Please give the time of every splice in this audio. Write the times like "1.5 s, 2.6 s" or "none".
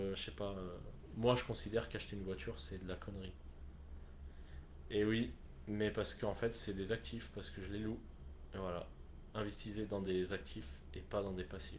4.3 s, 9.3 s